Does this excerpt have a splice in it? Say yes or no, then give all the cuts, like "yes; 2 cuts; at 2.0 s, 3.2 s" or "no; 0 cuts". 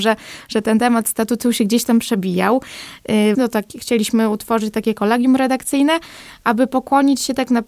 yes; 1 cut; at 3.3 s